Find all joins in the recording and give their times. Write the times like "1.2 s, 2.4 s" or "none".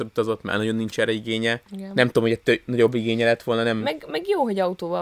1.7 s